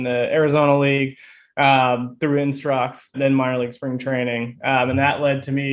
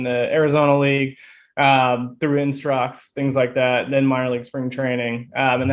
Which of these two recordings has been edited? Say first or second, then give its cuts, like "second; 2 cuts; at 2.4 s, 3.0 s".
first; 1 cut; at 3.1 s